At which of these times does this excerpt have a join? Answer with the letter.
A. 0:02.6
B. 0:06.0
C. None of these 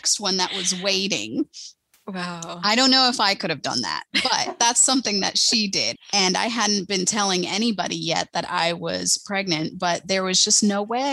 B